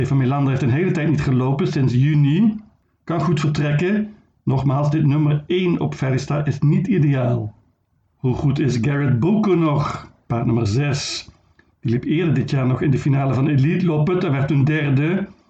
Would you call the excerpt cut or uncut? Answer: uncut